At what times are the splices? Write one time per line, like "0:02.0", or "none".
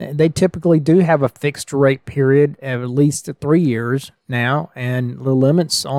none